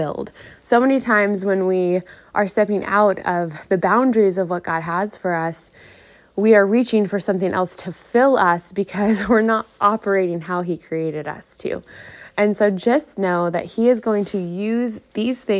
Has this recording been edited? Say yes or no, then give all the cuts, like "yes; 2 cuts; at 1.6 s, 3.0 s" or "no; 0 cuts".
no; 0 cuts